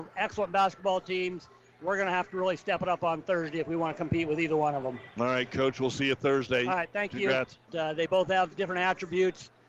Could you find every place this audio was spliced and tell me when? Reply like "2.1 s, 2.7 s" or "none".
7.7 s

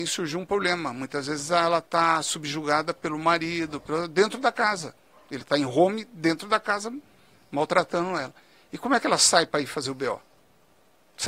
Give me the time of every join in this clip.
none

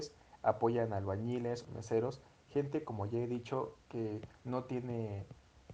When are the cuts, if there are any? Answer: 1.6 s

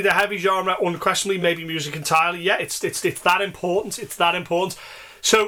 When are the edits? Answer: none

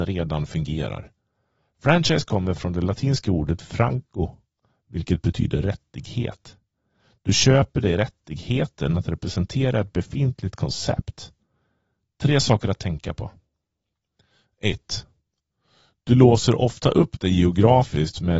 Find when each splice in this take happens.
none

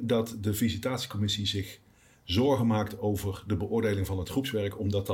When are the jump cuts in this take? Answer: none

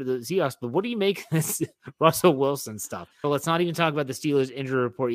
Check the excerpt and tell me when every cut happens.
3.2 s

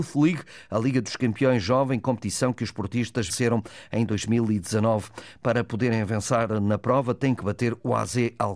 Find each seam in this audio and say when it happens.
3.3 s

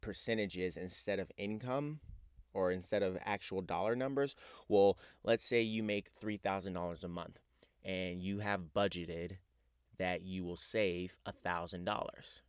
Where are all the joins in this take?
none

